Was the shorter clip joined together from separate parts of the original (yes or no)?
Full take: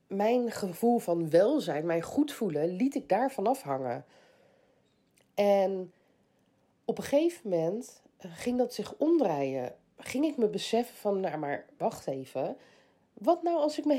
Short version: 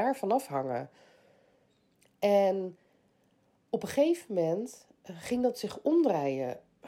no